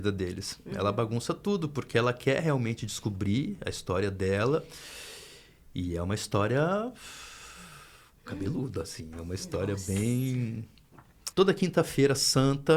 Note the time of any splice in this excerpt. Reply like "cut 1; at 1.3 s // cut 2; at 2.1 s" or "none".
cut 1; at 11.3 s

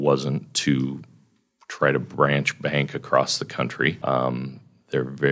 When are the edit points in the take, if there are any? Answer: cut 1; at 4.0 s

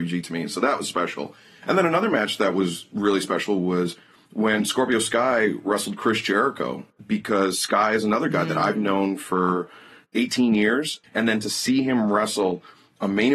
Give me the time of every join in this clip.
cut 1; at 11.0 s

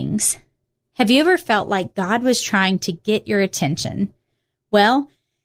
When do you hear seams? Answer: none

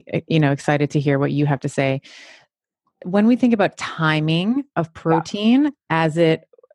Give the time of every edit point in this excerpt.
none

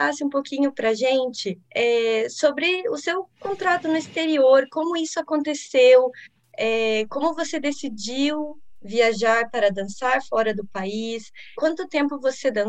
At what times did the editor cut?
cut 1; at 1.6 s // cut 2; at 11.5 s

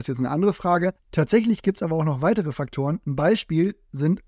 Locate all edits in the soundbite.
cut 1; at 1.0 s

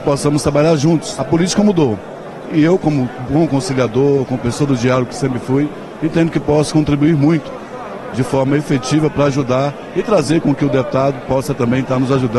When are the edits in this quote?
none

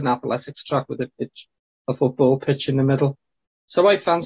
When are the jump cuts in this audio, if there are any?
none

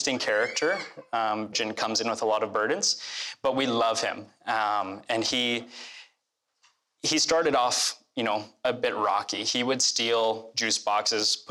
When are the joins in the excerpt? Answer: cut 1; at 1.5 s

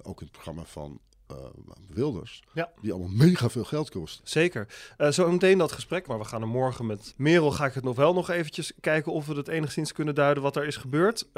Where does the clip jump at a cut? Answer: cut 1; at 4.2 s // cut 2; at 6.1 s // cut 3; at 7.1 s

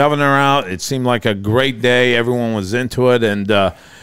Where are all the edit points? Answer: none

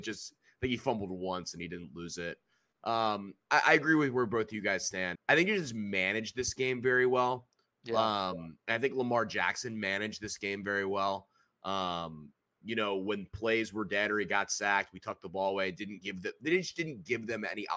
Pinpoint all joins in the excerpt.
cut 1; at 5.2 s

